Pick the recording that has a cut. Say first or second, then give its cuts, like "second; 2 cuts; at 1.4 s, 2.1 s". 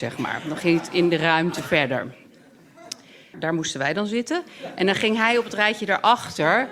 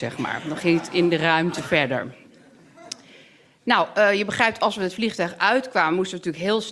first; 1 cut; at 3.3 s